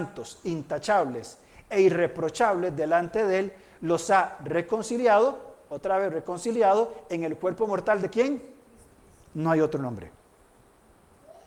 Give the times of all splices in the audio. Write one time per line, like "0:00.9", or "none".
none